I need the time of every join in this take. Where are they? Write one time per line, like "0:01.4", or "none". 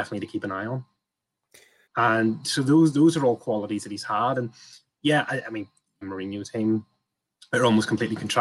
0:01.9
0:06.0